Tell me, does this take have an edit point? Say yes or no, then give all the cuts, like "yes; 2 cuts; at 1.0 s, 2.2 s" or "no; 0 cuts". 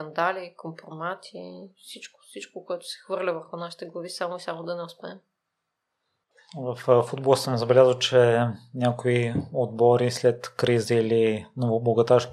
no; 0 cuts